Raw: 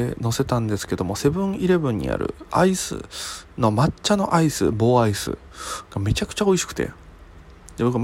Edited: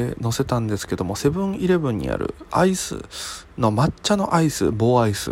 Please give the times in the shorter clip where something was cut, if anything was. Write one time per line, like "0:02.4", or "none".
none